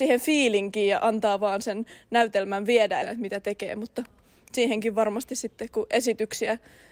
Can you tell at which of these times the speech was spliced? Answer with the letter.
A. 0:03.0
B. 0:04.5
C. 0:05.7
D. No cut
A